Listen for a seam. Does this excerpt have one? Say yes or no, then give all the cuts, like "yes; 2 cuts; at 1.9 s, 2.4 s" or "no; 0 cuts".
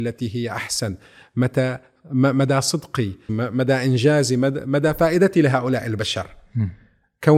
yes; 1 cut; at 3.3 s